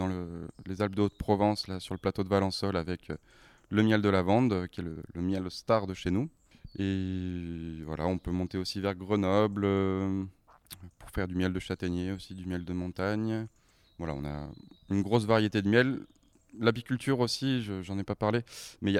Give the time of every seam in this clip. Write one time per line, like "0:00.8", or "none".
none